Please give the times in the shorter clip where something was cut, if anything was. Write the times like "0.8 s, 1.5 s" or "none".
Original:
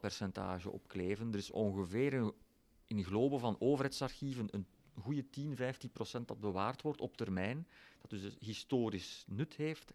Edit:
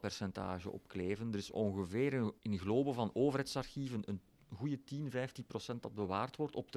2.4 s